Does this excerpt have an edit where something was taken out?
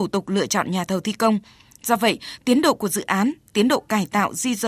no; 0 cuts

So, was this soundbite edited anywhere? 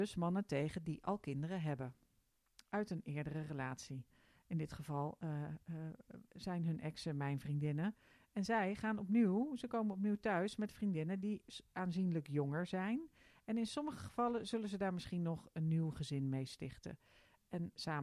no; 0 cuts

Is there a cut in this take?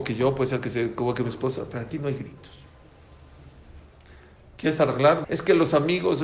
yes; 1 cut; at 5.2 s

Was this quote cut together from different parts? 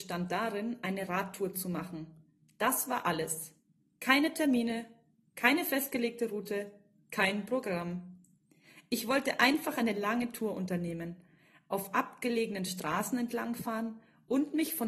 no; 0 cuts

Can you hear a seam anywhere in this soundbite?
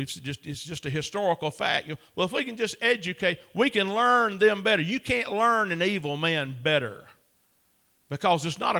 no; 0 cuts

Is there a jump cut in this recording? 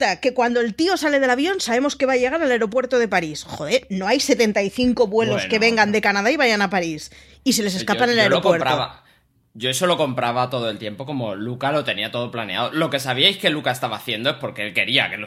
no; 0 cuts

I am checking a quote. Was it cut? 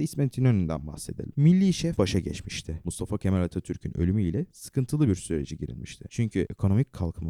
no; 0 cuts

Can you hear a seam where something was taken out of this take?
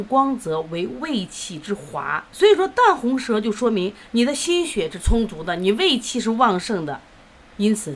yes; 1 cut; at 2.3 s

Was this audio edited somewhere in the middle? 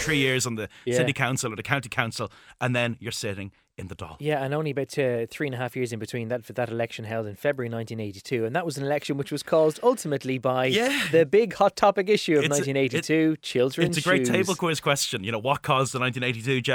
no; 0 cuts

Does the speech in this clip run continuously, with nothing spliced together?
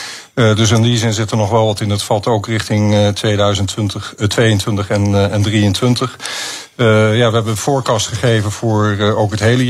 yes; 0 cuts

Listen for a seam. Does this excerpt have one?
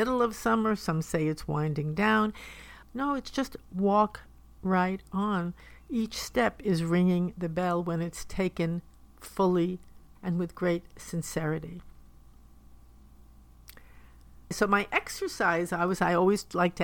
yes; 3 cuts; at 2.8 s, 10.2 s, 14.5 s

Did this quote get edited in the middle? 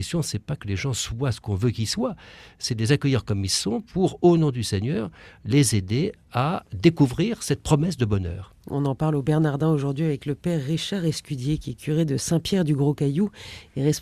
no; 0 cuts

